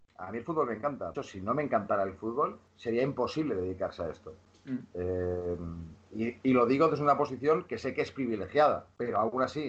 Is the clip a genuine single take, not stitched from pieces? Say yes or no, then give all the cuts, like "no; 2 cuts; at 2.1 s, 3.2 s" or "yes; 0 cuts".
no; 2 cuts; at 1.1 s, 6.4 s